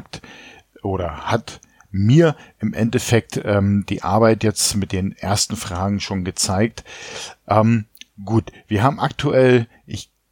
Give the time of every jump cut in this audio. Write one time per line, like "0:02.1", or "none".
none